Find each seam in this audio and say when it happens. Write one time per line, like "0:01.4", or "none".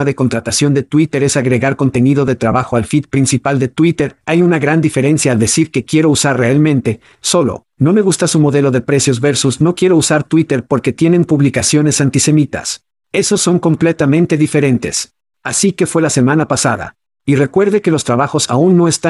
0:04.2